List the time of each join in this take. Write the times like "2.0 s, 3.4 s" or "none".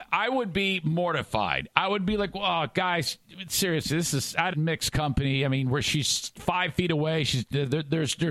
4.5 s